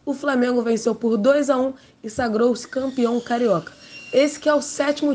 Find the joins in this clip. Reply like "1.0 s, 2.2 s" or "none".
none